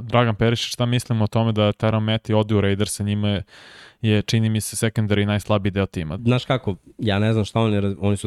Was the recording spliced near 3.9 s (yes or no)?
no